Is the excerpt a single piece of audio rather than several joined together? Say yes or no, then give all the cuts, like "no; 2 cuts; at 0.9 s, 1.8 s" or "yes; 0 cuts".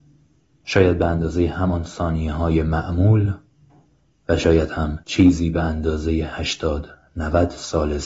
no; 1 cut; at 5.0 s